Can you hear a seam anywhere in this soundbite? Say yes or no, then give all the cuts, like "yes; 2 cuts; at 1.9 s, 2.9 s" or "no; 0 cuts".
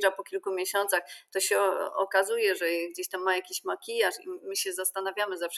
no; 0 cuts